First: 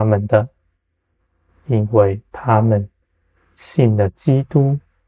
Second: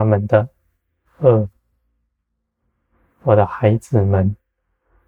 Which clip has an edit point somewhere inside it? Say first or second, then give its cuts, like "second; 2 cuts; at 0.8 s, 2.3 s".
second; 1 cut; at 1.0 s